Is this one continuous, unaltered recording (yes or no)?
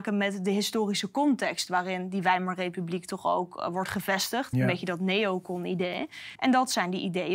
no